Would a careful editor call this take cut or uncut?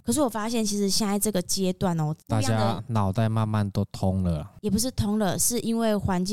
uncut